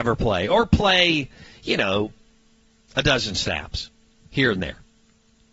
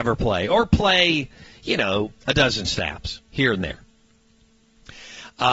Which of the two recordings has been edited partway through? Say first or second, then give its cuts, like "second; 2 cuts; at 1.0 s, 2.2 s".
second; 2 cuts; at 2.2 s, 3.3 s